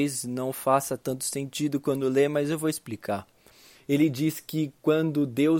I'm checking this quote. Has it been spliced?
yes; 1 cut; at 3.7 s

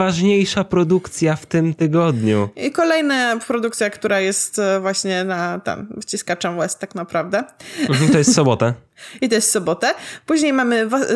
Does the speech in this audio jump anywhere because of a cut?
no; 0 cuts

